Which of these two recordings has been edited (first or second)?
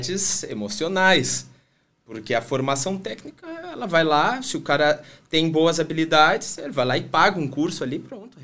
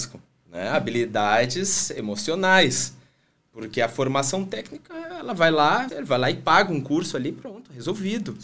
second